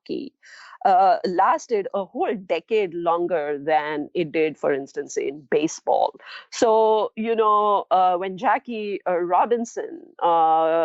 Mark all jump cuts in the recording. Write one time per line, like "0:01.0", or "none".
none